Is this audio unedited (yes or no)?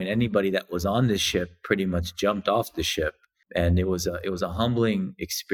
no